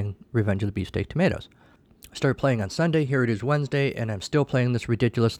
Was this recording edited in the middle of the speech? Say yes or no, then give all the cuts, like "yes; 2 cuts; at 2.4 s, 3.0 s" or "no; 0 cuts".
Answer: no; 0 cuts